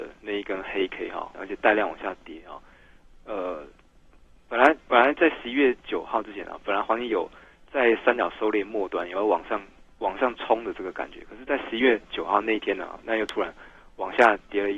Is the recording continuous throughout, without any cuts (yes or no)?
no